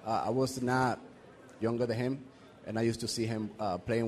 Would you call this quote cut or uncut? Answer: cut